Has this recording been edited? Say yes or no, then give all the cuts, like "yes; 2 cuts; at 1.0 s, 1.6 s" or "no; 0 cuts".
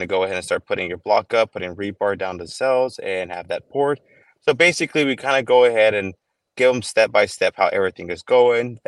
no; 0 cuts